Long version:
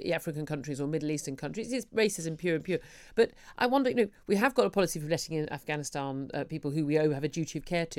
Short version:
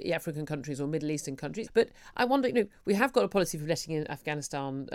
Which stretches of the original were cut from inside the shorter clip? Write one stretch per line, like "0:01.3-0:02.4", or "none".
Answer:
0:01.7-0:03.1

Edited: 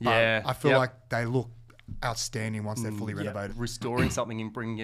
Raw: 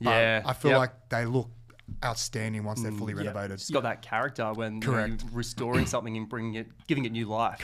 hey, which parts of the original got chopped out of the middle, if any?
0:03.5-0:05.2

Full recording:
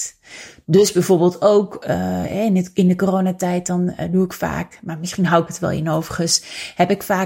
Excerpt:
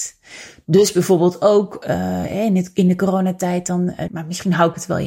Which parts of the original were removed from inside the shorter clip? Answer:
0:04.1-0:04.8

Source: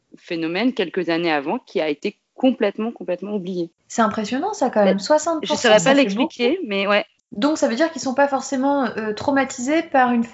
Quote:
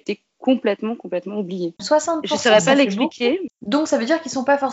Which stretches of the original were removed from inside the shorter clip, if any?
0:03.8-0:05.0
0:06.7-0:07.2

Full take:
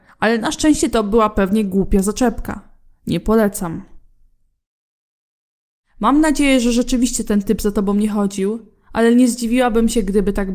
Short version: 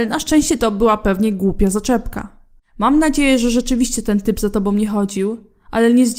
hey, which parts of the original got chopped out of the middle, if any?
0:02.9-0:05.8

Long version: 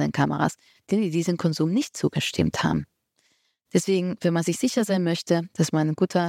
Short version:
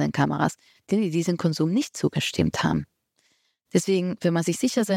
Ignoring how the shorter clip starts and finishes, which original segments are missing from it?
none

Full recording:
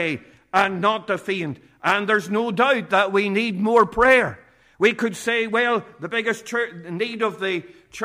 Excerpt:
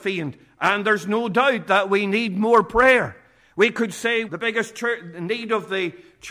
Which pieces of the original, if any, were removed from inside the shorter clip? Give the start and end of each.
0:05.5-0:06.0

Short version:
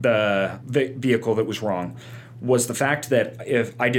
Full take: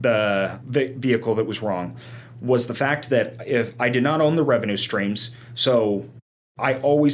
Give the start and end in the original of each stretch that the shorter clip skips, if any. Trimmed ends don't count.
none

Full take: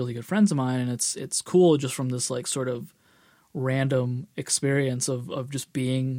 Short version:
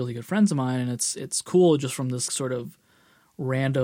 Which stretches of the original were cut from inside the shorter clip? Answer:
0:02.3-0:02.4

